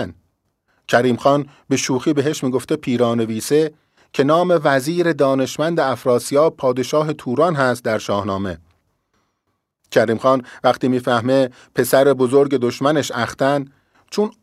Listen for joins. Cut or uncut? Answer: cut